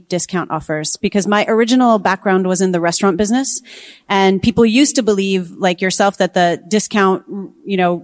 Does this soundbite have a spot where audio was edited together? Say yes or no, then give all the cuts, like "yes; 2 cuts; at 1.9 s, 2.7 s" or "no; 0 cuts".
no; 0 cuts